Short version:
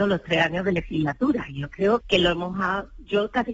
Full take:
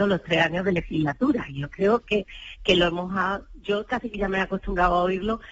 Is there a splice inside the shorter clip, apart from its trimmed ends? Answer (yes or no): yes